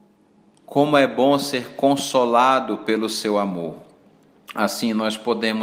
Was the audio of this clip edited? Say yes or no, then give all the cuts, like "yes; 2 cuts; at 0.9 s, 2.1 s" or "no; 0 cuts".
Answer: no; 0 cuts